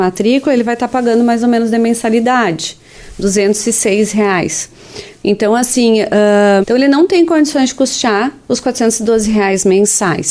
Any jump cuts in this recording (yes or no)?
yes